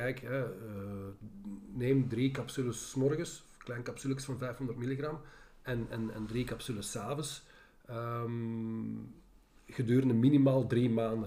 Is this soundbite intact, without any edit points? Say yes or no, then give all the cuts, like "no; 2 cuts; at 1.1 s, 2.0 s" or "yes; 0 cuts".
yes; 0 cuts